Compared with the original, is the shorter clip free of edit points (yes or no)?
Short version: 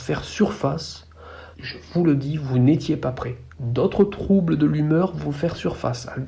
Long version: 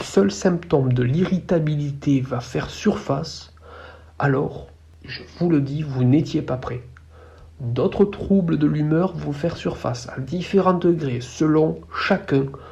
no